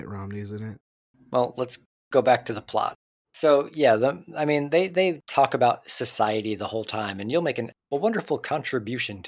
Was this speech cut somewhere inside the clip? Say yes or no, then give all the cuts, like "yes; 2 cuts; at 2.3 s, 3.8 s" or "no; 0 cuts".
yes; 1 cut; at 3.2 s